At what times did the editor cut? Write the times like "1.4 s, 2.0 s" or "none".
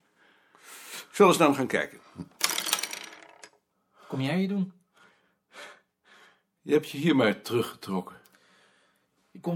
6.6 s